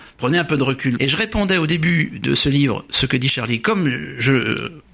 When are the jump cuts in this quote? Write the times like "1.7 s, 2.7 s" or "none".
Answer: 1.0 s

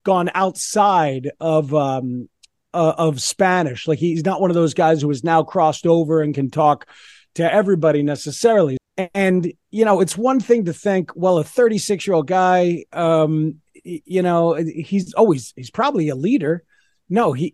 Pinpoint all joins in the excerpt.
8.8 s

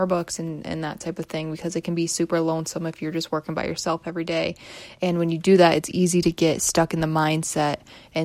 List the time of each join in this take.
none

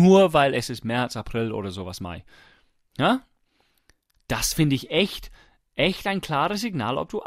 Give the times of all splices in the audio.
none

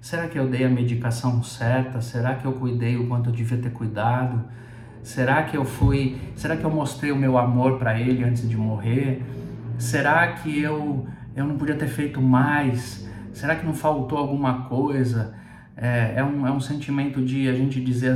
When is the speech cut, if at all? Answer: none

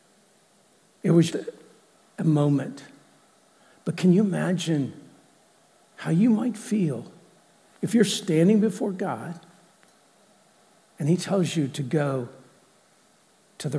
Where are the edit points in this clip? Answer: 1.3 s

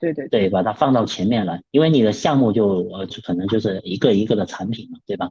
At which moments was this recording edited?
1.7 s, 3.1 s

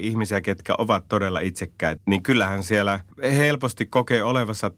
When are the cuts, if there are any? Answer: 2.0 s, 3.1 s

